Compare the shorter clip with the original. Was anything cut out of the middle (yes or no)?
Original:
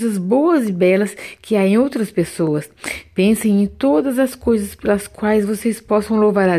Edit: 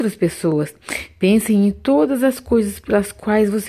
no